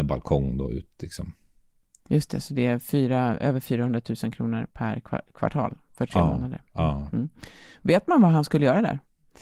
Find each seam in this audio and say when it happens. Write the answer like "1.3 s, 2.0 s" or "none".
none